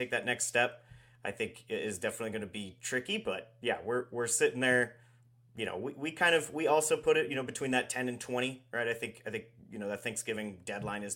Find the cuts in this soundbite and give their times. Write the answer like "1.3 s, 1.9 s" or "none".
none